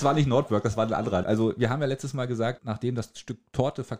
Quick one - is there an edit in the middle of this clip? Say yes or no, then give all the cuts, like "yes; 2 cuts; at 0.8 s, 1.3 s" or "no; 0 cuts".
yes; 2 cuts; at 1.2 s, 2.6 s